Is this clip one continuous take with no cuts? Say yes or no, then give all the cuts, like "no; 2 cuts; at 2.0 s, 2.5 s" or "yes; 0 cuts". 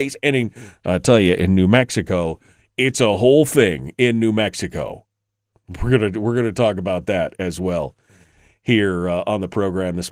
yes; 0 cuts